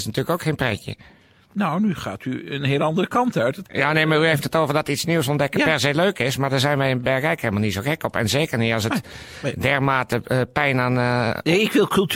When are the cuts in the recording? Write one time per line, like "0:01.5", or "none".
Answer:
none